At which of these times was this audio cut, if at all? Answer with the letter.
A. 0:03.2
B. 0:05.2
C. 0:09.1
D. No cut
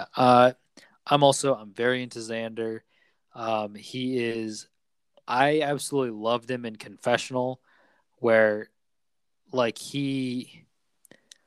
D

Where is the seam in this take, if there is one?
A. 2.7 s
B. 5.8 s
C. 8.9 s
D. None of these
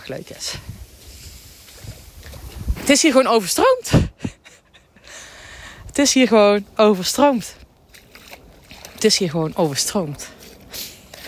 A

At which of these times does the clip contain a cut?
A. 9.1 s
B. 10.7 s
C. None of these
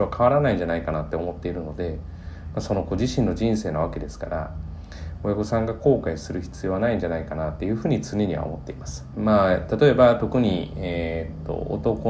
A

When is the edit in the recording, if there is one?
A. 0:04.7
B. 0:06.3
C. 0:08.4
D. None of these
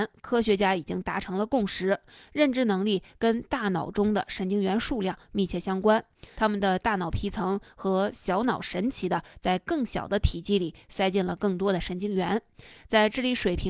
B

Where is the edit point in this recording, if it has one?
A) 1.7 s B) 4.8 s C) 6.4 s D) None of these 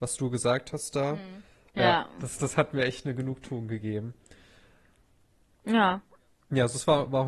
A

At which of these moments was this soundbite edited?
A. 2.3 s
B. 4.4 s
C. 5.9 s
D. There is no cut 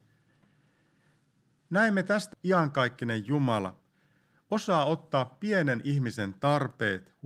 A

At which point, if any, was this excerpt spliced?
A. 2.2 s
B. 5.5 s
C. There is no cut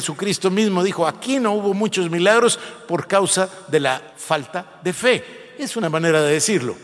C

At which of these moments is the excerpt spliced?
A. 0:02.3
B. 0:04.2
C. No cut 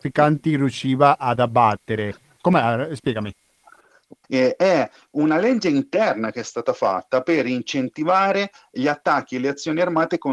B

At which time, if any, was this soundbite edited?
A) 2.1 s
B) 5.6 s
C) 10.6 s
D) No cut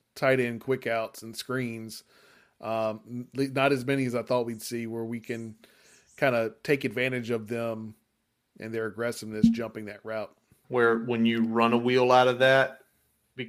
C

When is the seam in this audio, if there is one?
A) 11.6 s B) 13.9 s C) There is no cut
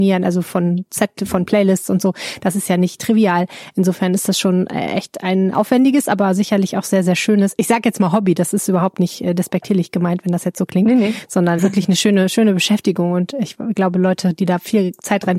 A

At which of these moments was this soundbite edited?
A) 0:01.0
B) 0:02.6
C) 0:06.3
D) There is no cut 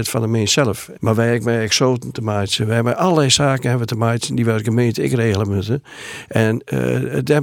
A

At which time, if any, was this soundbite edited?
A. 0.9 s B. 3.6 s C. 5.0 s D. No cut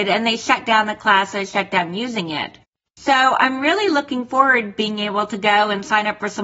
D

